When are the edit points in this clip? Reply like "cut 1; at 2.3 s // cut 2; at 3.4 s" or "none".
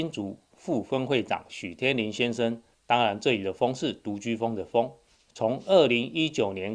cut 1; at 2.7 s